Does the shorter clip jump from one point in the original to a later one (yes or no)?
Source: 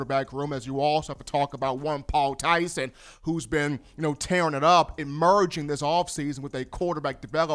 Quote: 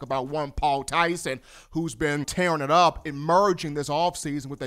yes